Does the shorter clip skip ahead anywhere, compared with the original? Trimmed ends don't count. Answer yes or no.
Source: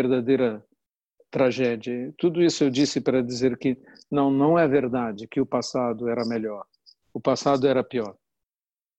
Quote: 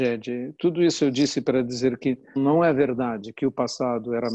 yes